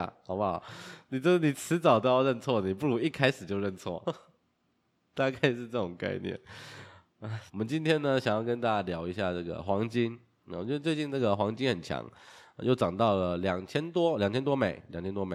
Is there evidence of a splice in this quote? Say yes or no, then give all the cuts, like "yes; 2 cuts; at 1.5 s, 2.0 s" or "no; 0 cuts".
yes; 2 cuts; at 4.0 s, 7.5 s